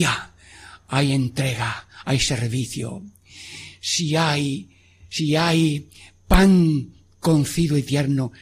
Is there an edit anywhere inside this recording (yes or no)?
no